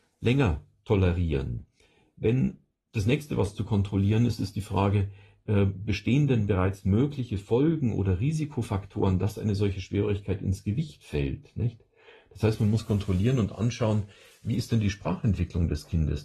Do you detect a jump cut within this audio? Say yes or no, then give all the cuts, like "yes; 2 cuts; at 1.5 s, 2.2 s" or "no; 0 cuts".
no; 0 cuts